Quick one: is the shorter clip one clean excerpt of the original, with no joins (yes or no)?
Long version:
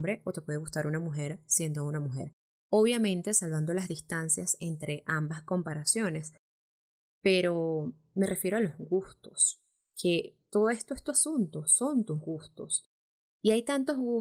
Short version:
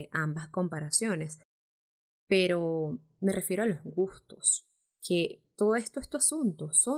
yes